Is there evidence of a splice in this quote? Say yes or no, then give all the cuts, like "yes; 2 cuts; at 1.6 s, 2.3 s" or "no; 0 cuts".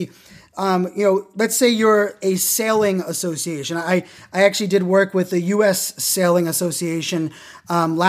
no; 0 cuts